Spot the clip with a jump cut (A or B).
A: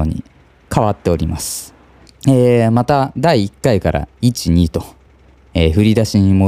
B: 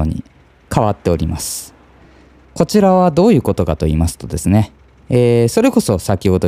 A